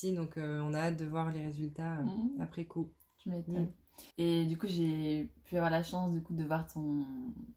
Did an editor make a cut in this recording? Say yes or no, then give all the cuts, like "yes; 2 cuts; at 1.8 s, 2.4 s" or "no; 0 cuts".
yes; 1 cut; at 4.1 s